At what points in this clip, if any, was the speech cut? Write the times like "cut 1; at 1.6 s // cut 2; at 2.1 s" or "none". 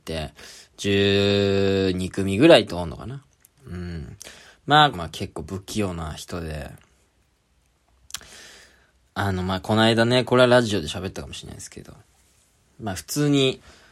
cut 1; at 3.6 s // cut 2; at 4.9 s